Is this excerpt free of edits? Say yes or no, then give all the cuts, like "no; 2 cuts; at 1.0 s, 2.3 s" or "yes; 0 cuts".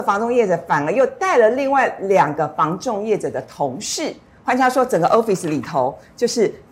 yes; 0 cuts